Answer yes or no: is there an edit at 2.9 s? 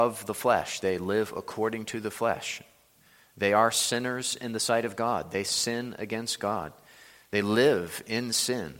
no